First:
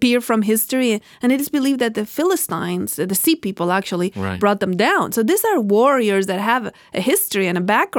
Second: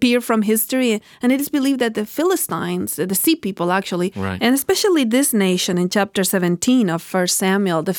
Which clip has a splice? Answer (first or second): second